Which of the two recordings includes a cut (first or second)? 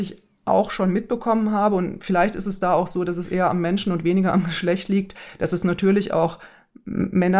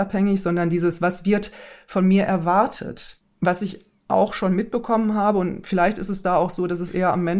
second